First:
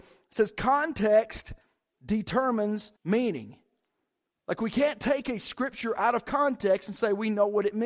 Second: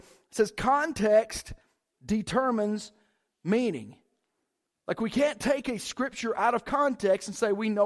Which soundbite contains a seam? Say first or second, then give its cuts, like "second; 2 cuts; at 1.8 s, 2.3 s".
first; 1 cut; at 3.0 s